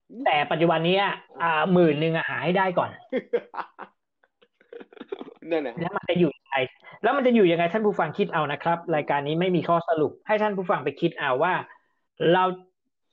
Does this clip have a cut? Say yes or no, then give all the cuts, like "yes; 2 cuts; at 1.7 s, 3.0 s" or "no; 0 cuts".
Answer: yes; 2 cuts; at 1.3 s, 10.2 s